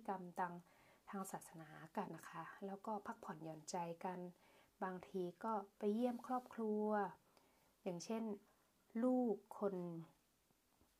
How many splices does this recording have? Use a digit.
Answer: 1